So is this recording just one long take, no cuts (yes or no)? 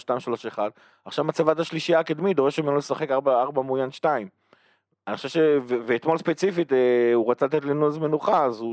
yes